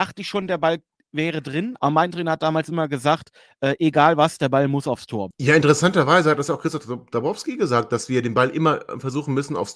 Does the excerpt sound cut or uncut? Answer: cut